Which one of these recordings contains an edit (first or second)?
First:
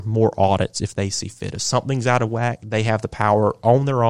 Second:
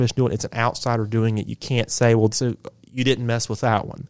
second